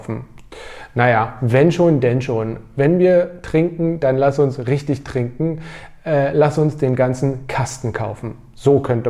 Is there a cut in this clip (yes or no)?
no